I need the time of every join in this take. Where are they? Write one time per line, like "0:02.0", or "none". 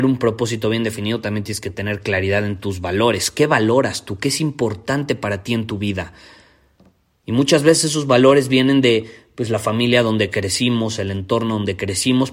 none